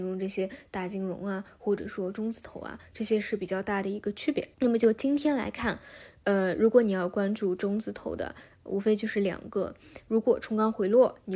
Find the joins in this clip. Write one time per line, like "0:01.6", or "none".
0:04.5